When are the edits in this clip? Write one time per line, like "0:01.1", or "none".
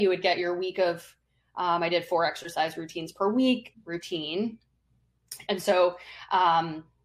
0:03.7
0:05.5